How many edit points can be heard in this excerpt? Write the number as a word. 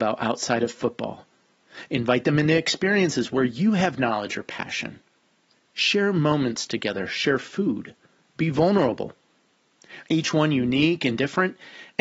one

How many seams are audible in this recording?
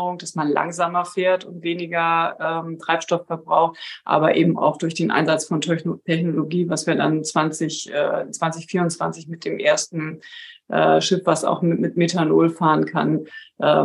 zero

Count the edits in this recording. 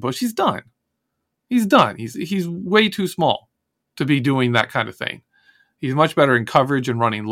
one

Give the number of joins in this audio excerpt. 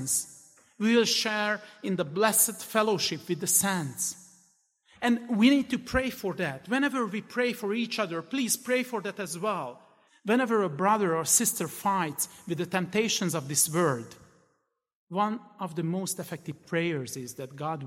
one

